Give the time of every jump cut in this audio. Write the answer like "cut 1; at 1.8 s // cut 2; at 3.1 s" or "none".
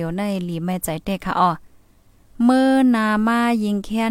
none